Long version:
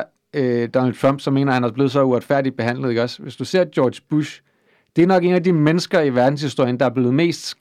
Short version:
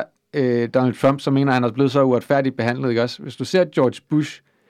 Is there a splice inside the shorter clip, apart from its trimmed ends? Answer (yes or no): no